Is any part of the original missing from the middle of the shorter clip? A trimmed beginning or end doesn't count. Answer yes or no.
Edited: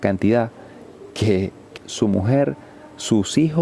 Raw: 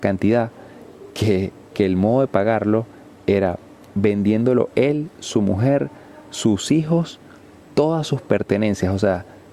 yes